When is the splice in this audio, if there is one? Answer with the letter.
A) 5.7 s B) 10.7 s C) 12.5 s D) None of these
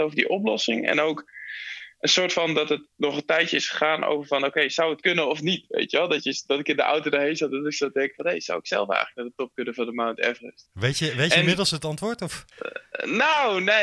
C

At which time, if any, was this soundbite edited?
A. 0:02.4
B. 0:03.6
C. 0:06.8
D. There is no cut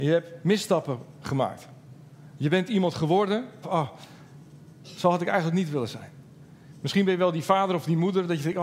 B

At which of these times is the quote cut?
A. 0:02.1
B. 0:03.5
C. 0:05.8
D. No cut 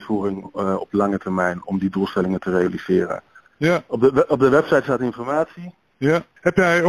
B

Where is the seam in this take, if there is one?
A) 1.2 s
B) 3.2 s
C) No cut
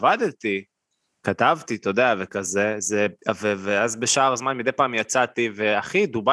B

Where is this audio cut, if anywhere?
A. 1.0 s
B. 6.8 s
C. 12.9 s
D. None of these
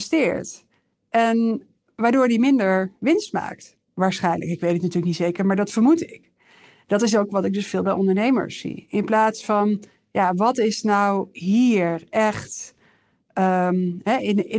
D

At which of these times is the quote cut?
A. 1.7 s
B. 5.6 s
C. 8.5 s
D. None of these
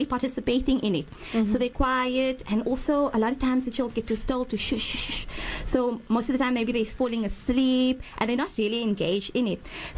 A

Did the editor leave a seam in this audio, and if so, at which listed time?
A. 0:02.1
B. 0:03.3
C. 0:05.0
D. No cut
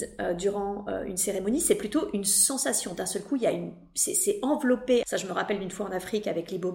C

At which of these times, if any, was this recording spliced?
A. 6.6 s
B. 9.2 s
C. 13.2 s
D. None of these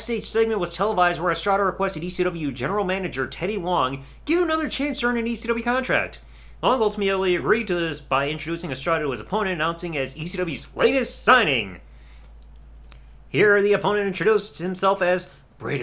D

